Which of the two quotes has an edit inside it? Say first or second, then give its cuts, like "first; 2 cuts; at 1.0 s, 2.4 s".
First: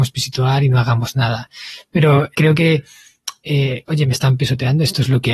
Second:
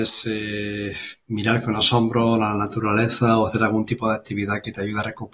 first; 2 cuts; at 2.3 s, 3.9 s